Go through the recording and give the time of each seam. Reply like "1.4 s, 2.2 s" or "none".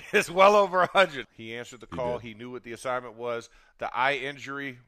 1.2 s